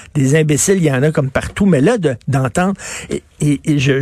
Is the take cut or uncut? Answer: uncut